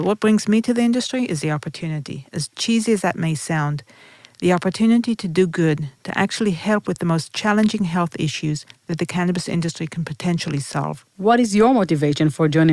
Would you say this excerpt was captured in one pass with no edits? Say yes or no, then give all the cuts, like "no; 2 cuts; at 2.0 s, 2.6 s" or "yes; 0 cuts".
no; 1 cut; at 11.1 s